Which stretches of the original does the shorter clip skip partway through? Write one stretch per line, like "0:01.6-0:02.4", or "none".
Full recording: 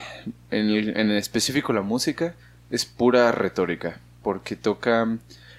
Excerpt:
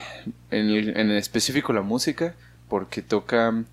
0:02.6-0:04.1